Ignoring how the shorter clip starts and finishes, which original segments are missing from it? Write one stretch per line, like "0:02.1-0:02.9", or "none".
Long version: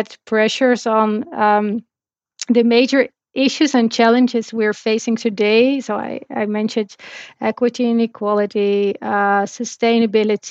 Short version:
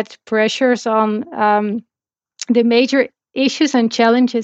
none